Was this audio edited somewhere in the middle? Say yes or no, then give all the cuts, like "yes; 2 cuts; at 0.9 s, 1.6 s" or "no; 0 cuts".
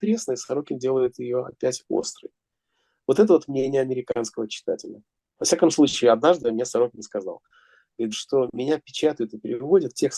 yes; 2 cuts; at 5.4 s, 8.1 s